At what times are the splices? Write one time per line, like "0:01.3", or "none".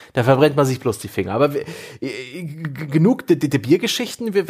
none